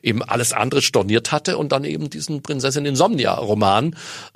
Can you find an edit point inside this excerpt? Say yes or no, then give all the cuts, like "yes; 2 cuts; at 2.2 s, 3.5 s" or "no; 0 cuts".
no; 0 cuts